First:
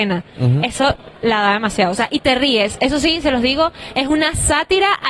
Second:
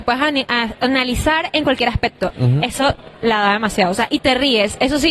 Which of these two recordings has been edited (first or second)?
second